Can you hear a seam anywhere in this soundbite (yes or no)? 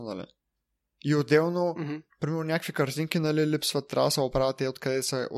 no